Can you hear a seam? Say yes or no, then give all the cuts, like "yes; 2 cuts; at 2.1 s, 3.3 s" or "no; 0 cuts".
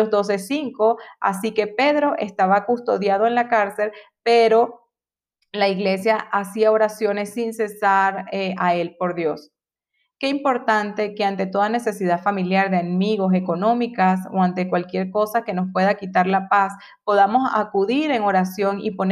no; 0 cuts